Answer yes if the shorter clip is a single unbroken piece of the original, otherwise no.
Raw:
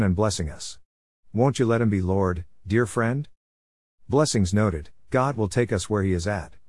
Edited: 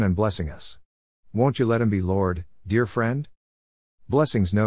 yes